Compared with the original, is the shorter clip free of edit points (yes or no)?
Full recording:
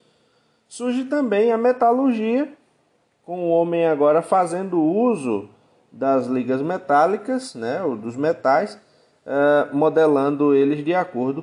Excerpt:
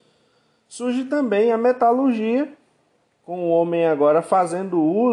yes